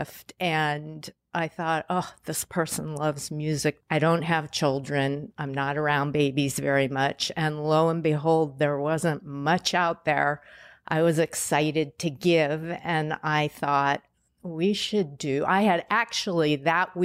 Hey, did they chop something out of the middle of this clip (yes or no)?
yes